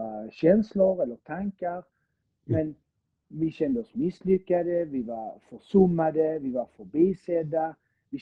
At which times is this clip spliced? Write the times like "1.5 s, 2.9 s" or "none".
none